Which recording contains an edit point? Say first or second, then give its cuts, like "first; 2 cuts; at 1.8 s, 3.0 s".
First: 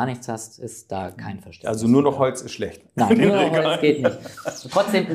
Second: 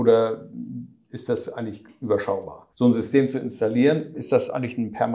second; 2 cuts; at 2.7 s, 4.1 s